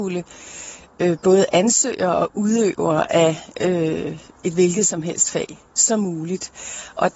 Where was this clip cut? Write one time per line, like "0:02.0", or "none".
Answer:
none